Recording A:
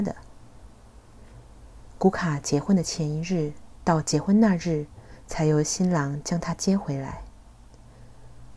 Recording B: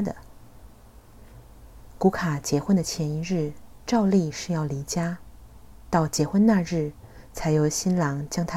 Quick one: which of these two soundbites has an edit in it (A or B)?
A